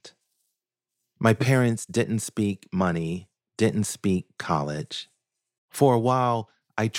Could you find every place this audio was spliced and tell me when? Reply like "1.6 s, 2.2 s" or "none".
5.6 s